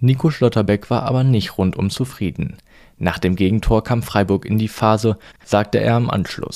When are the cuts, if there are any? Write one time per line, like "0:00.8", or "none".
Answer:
0:05.3